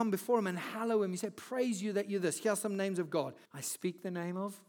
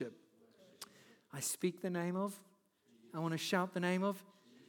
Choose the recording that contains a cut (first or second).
first